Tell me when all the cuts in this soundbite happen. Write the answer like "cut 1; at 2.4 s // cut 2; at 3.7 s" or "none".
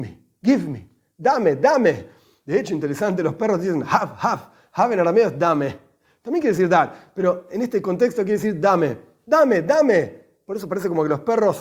none